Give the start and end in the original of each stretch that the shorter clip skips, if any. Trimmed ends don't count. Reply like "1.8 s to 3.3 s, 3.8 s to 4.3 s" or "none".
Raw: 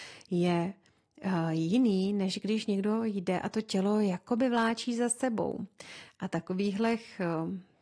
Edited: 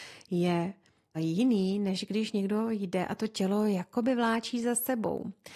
1.1 s to 1.5 s